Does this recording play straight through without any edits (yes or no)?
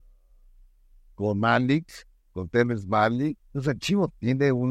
no